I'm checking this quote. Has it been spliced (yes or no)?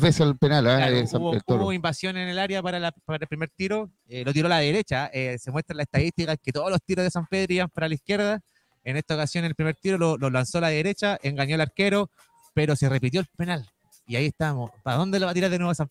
no